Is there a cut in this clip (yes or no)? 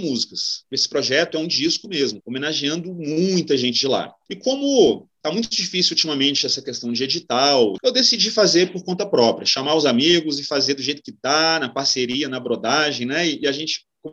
yes